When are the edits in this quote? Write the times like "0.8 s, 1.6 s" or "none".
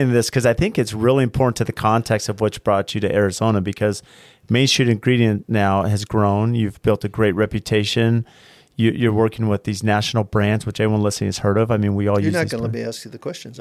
none